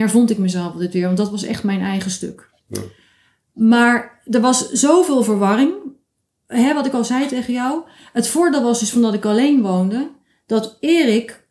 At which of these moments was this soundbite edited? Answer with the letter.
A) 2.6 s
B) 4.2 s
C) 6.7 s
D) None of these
A